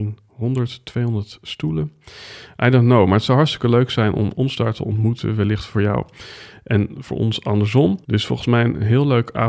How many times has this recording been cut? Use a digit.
1